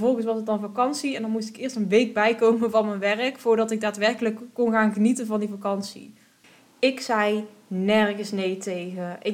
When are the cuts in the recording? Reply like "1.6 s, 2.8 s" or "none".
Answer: none

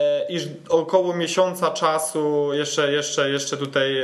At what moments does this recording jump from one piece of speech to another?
none

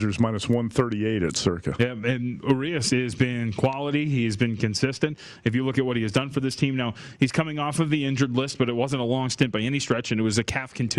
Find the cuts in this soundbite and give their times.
none

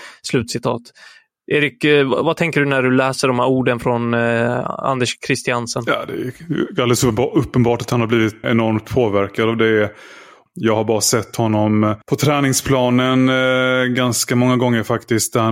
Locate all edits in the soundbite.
8.4 s, 10.5 s, 12.0 s

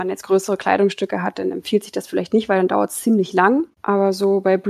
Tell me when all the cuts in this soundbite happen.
3.7 s

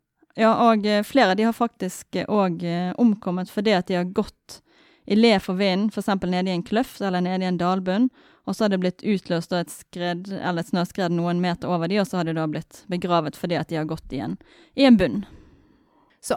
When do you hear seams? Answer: none

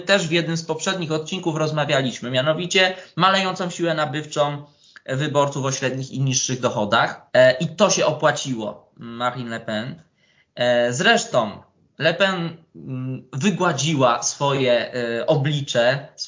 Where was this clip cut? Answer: 7.3 s

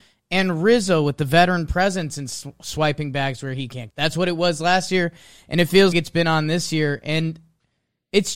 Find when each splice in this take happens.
3.9 s, 5.9 s

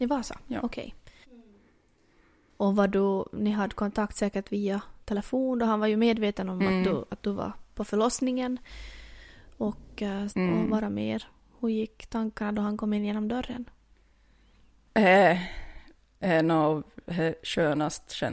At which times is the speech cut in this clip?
1.2 s, 10.3 s

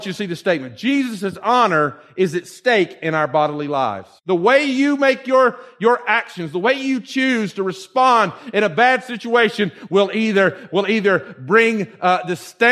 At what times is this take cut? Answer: 4.2 s

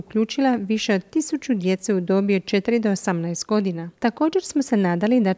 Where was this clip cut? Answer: 4.0 s

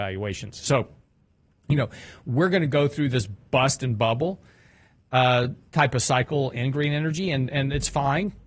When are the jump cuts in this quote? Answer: none

